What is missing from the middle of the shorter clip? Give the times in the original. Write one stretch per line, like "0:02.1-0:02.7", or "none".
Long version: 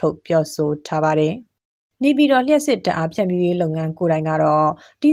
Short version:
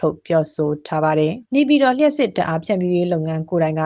0:01.5-0:01.9